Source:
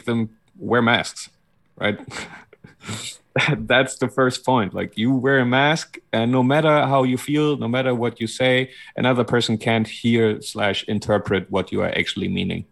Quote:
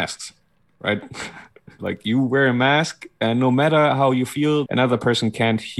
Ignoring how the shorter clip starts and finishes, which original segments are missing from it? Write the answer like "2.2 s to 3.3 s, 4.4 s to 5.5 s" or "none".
2.8 s to 4.7 s, 7.6 s to 8.9 s